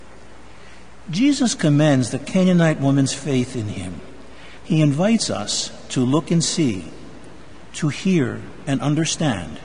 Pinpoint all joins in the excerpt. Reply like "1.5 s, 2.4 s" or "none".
4.6 s